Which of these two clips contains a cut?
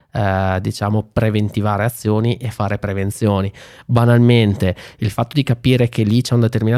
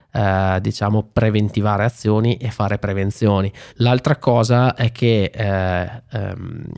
second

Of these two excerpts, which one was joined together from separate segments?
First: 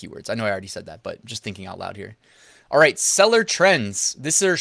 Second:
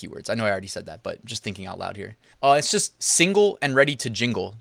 second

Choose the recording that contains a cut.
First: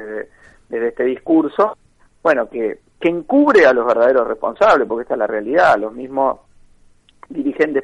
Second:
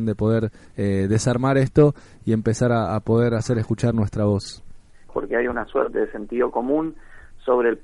second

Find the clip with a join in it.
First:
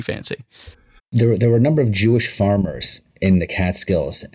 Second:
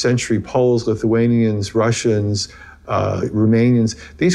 first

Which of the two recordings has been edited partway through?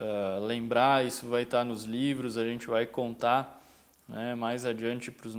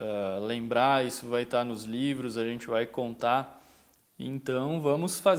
second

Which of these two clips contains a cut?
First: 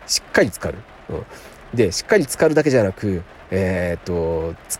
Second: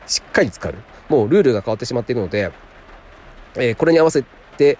second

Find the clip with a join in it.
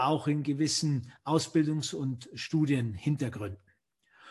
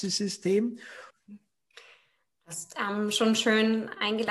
second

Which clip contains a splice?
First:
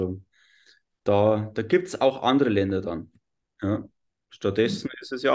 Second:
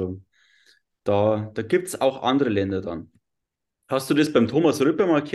first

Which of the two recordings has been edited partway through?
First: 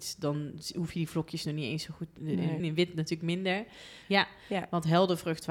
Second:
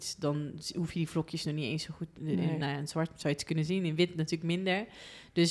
first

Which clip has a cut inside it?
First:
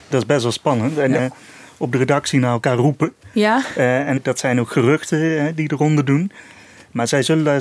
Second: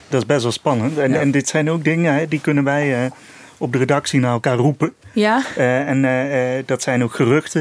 first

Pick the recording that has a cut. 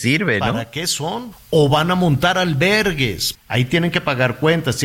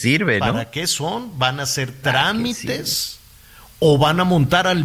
first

